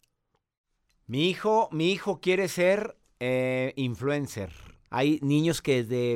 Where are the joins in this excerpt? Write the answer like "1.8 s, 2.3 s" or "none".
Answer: 4.9 s

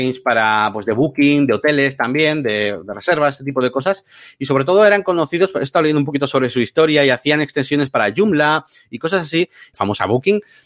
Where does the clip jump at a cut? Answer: 9.7 s

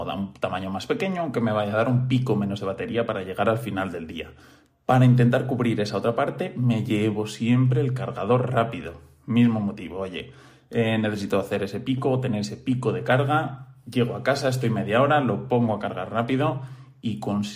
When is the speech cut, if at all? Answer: none

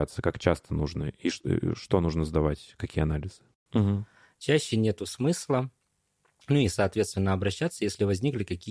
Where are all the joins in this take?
3.7 s

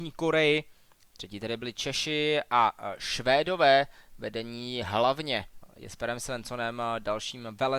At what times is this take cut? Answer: none

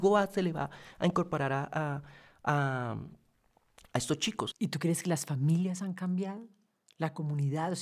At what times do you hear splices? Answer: 4.5 s

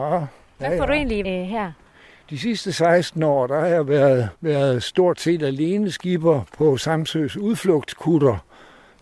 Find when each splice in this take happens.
1.2 s, 4.4 s

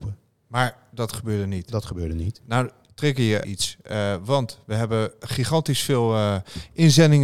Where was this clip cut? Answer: 3.4 s

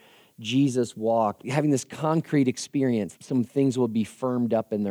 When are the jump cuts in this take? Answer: 1.4 s, 3.2 s

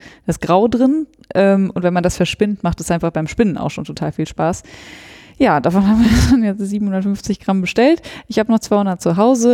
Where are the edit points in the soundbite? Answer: none

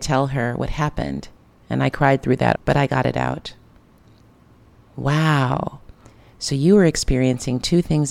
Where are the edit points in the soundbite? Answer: 2.6 s

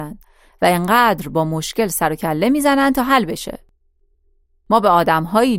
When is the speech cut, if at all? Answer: none

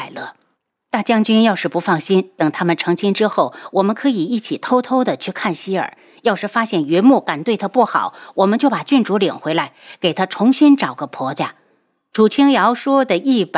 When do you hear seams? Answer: none

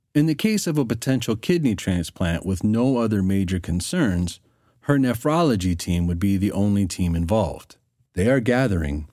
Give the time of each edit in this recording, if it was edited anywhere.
8.1 s

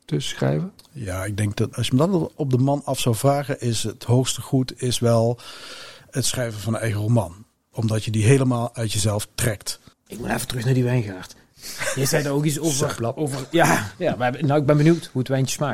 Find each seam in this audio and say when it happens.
9.9 s

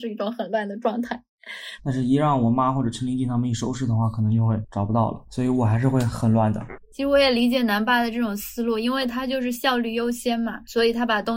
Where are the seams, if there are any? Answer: 1.8 s

